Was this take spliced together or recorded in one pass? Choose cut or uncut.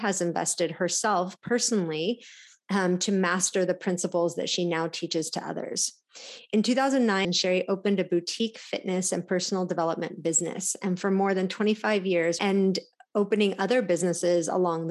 cut